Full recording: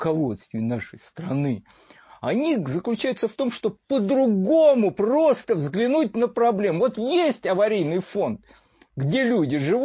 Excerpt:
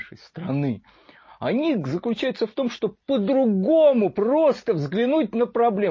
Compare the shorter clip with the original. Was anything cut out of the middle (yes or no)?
no